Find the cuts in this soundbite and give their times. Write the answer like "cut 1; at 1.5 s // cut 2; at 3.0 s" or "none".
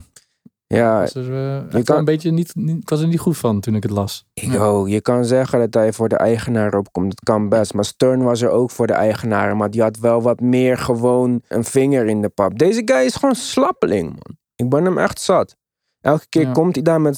cut 1; at 11.5 s